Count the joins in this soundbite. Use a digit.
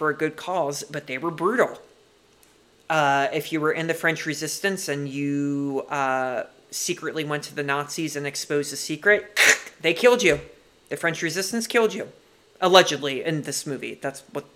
1